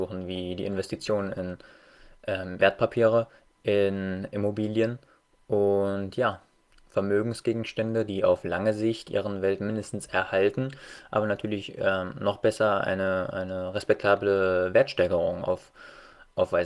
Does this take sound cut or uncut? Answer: cut